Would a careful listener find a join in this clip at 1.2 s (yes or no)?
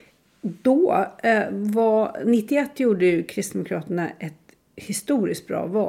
no